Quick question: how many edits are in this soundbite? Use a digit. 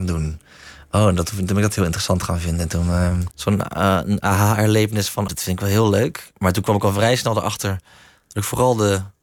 2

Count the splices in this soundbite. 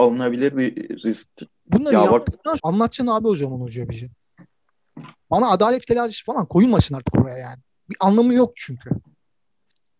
2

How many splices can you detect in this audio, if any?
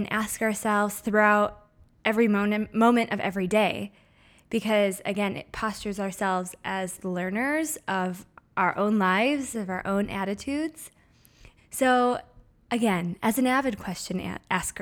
2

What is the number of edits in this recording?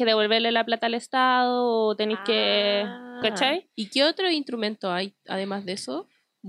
0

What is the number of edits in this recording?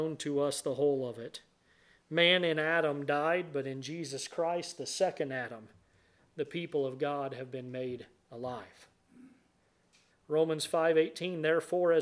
1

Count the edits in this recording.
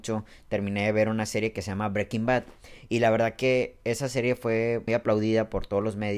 1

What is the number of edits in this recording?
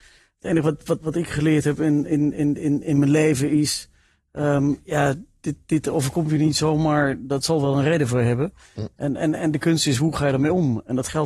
1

